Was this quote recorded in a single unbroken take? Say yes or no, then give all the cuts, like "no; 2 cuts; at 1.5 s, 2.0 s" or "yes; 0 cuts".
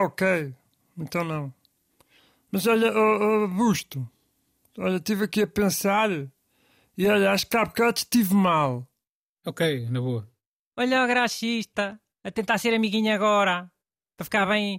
yes; 0 cuts